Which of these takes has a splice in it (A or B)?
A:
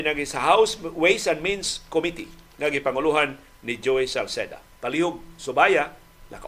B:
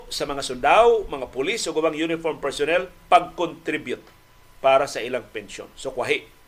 A